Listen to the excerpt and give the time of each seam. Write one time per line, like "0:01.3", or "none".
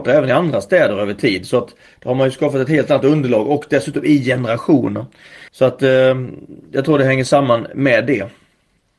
0:05.5